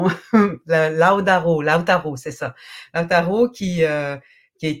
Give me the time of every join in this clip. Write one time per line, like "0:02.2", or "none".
none